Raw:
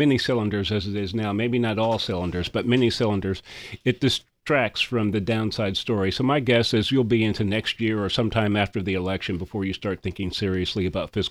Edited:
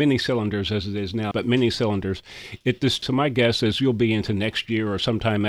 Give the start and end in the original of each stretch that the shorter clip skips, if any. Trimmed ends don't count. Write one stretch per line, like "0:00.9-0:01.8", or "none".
0:01.3-0:02.5
0:04.2-0:06.1